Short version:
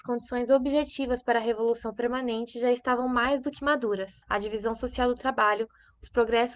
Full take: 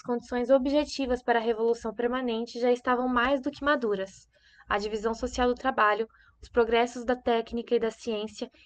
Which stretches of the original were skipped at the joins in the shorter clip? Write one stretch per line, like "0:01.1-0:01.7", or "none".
0:04.2-0:04.6